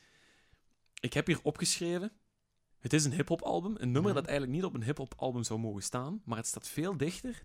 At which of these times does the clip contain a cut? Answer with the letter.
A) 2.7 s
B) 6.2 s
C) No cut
A